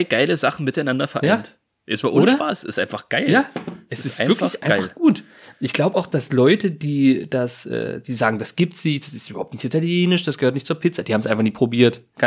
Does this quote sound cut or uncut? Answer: uncut